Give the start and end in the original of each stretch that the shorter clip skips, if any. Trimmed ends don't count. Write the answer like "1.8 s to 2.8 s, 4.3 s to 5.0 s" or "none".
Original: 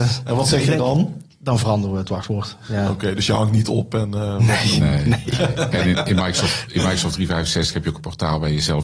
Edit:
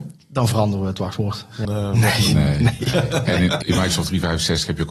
2.8 s to 4.1 s, 6.1 s to 6.7 s